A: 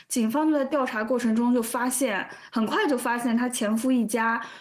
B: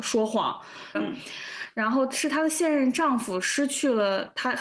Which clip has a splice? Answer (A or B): B